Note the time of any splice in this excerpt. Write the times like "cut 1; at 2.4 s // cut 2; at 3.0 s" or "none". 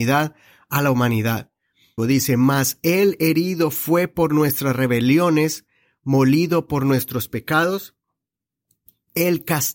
cut 1; at 2.0 s

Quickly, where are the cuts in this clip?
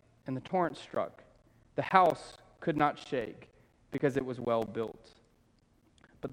none

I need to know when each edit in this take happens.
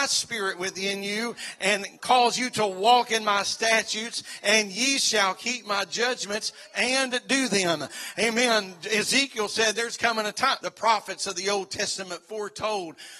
cut 1; at 10.6 s

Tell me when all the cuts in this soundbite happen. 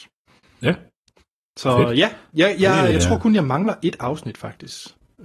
cut 1; at 2.9 s

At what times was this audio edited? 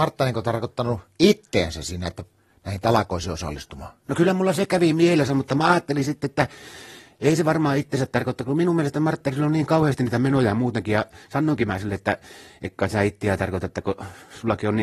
none

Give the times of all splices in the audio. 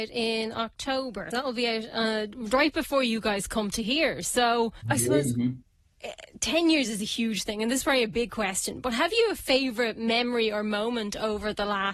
cut 1; at 1.3 s // cut 2; at 4.8 s

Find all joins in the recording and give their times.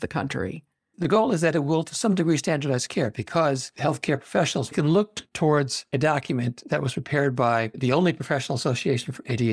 none

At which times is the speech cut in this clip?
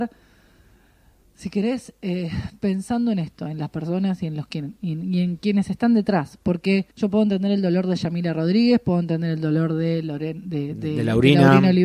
cut 1; at 6.9 s

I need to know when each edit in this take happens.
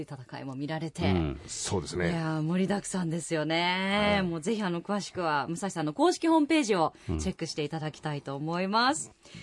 none

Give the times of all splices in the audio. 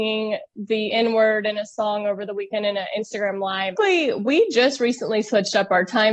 cut 1; at 3.8 s

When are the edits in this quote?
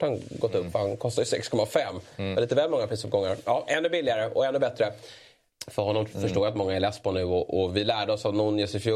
cut 1; at 5.5 s

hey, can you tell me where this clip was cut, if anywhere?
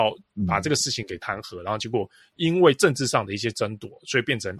none

